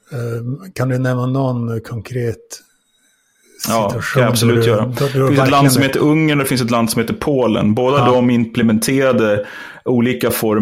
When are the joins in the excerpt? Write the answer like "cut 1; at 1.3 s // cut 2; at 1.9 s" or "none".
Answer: none

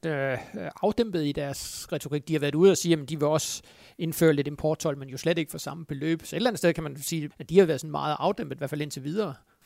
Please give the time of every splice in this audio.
cut 1; at 7.3 s

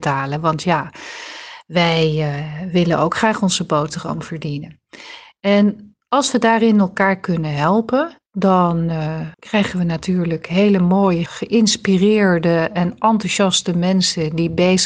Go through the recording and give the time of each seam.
cut 1; at 9.3 s // cut 2; at 11.3 s

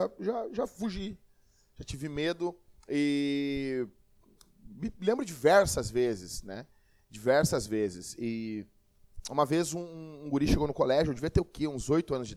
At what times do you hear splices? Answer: none

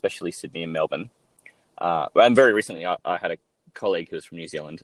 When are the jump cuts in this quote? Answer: none

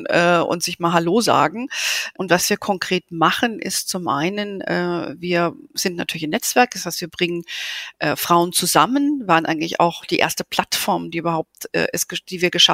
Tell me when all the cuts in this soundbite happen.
cut 1; at 2.1 s

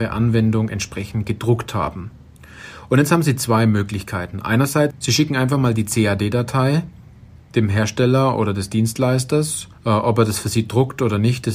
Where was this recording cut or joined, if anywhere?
cut 1; at 4.9 s // cut 2; at 9.7 s

